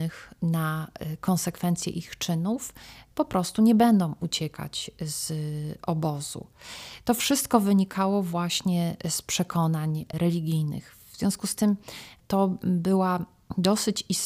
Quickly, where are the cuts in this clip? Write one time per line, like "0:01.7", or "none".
none